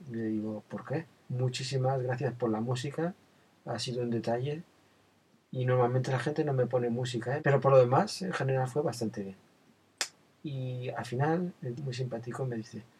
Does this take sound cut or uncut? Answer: cut